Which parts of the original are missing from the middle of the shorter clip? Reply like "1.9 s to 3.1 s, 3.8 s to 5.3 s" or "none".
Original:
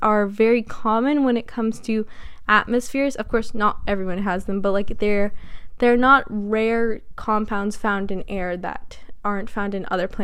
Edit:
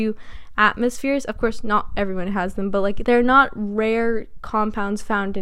4.9 s to 5.8 s